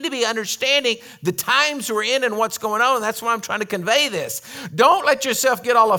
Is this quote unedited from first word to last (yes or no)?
yes